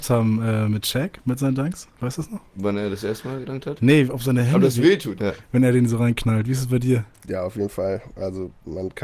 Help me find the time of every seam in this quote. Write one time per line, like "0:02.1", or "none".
0:05.2

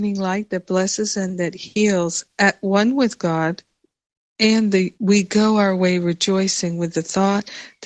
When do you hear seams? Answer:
0:04.9

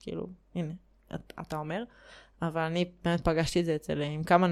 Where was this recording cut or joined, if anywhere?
none

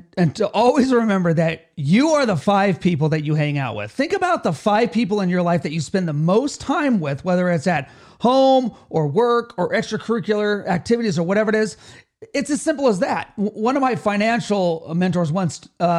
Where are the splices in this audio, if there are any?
none

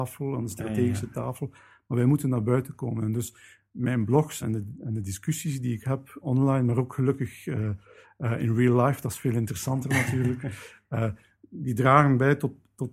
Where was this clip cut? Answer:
0:04.4
0:06.2

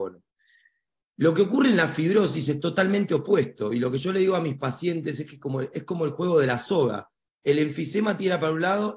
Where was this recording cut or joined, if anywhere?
none

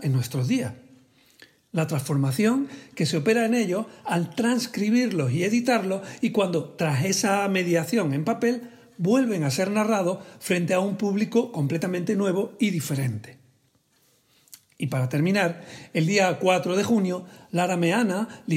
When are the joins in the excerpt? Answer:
none

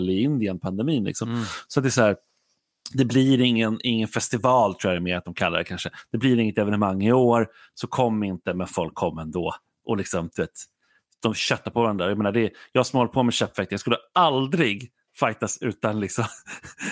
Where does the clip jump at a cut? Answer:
none

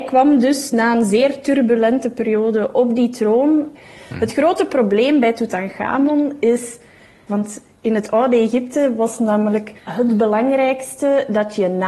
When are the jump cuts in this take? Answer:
0:07.3
0:09.8

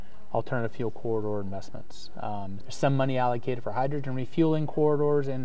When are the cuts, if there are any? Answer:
0:02.6

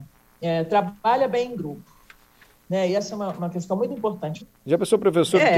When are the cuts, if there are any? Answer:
0:04.4

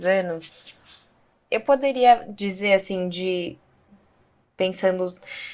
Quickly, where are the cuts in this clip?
none

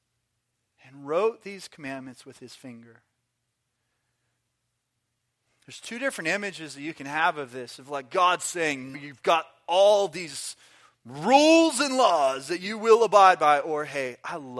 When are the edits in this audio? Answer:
0:08.9

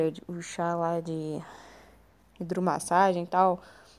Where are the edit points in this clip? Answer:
none

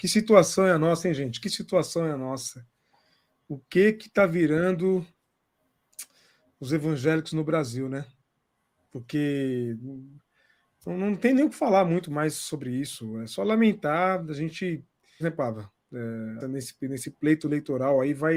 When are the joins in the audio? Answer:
0:15.2
0:16.4

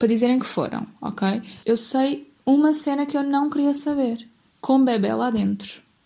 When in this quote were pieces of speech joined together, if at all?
0:01.6
0:04.5

